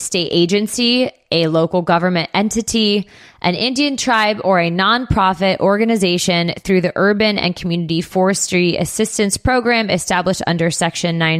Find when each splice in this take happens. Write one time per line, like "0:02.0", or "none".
none